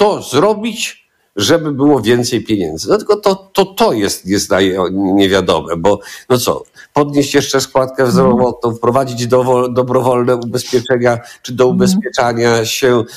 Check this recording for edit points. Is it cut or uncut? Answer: uncut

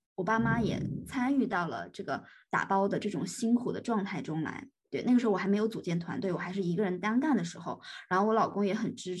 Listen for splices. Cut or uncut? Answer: uncut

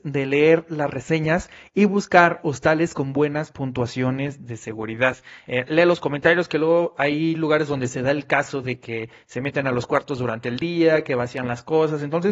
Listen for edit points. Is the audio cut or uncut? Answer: uncut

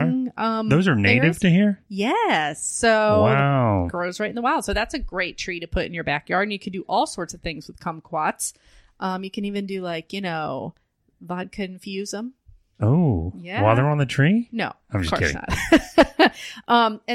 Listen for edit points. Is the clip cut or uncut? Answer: uncut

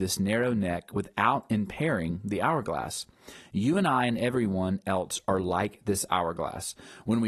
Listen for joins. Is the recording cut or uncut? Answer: uncut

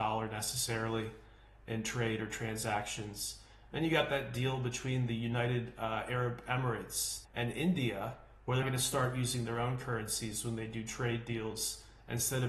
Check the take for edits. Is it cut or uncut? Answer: cut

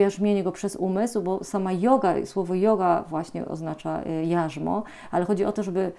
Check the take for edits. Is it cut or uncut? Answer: uncut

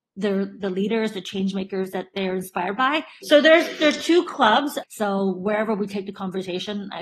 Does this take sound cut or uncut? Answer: cut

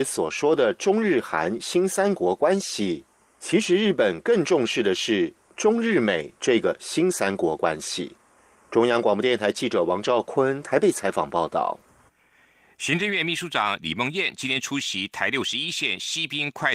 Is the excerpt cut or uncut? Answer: uncut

